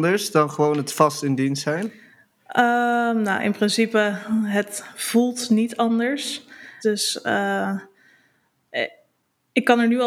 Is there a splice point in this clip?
yes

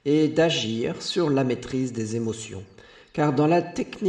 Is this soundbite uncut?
yes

